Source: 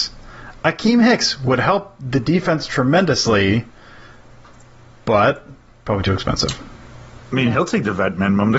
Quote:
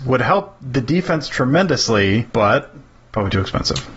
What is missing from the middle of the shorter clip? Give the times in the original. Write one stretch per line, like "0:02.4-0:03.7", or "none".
0:03.7-0:05.0